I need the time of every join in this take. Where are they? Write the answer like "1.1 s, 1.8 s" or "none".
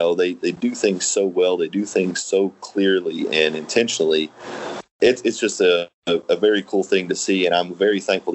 4.9 s

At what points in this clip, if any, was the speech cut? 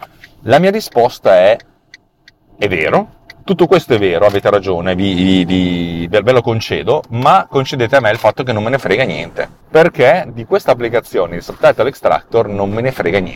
none

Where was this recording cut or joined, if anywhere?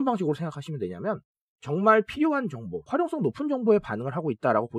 2.9 s

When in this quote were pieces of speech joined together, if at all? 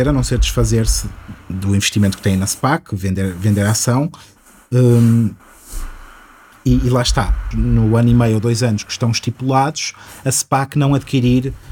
7.5 s

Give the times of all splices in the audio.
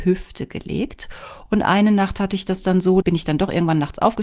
1.5 s, 3.0 s

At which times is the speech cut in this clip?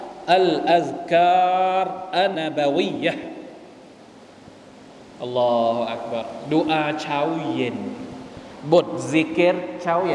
2.3 s

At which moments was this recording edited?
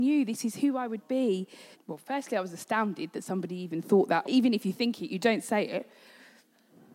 1.7 s, 4.2 s

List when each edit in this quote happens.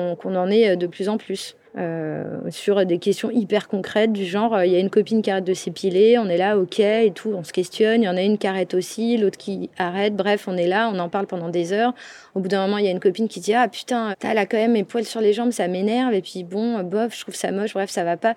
1.7 s, 14.1 s, 15.5 s

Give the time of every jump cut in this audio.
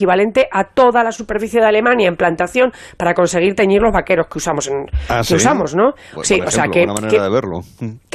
none

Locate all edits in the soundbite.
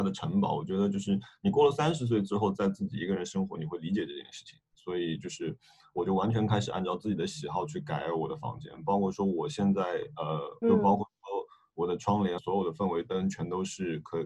10.6 s, 12.4 s

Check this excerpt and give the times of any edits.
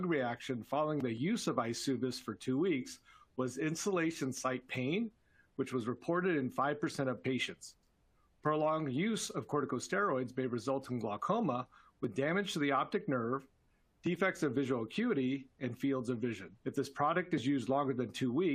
16.6 s

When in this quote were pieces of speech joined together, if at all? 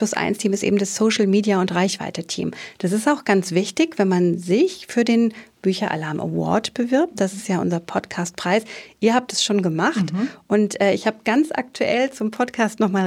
none

